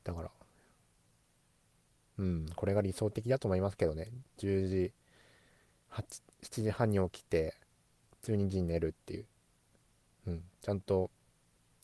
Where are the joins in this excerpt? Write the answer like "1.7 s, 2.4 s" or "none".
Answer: none